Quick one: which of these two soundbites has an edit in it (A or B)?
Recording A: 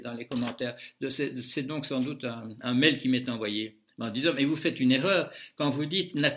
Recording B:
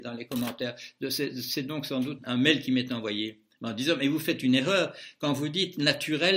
B